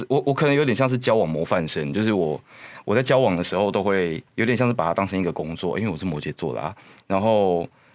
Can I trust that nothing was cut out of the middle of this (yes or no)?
no